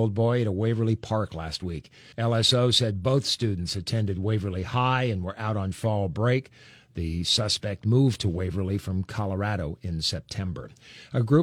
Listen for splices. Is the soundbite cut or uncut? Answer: cut